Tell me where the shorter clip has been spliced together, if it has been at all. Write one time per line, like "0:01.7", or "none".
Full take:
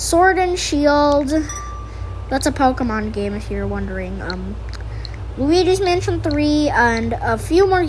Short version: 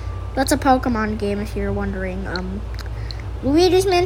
none